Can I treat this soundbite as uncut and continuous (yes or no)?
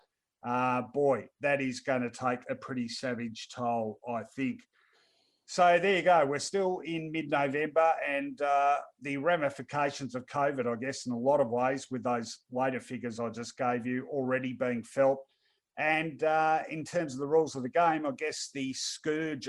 yes